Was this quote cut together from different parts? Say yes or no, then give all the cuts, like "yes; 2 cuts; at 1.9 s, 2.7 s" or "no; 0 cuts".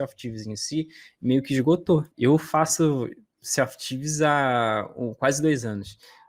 yes; 1 cut; at 2.1 s